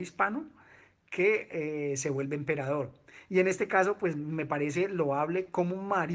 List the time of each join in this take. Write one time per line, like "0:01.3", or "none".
none